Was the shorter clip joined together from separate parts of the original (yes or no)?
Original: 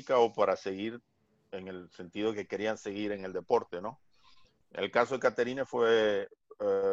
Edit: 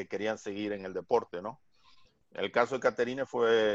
no